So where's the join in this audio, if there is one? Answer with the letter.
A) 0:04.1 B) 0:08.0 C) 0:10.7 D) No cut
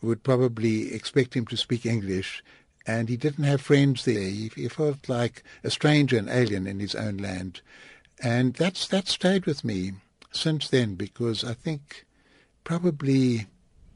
A